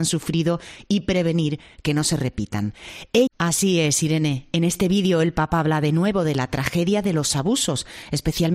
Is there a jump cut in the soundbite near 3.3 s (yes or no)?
yes